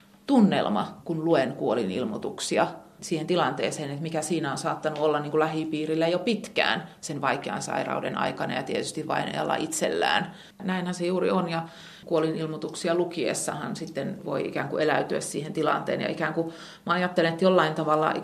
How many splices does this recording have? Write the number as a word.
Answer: two